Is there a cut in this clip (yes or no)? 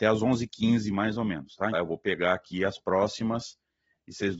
yes